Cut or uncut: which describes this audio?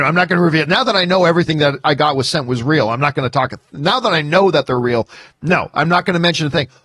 uncut